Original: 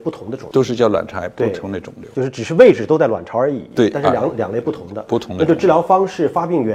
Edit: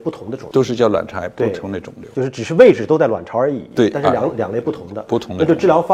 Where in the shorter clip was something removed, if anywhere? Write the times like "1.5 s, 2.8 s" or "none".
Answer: none